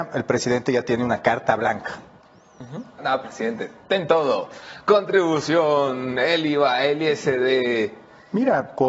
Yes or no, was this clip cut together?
yes